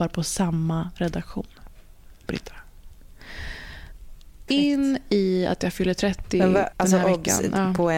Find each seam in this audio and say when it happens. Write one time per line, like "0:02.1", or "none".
0:04.5
0:06.7